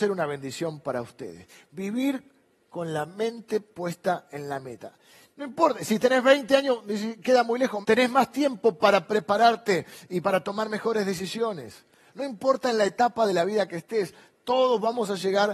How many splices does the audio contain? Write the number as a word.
two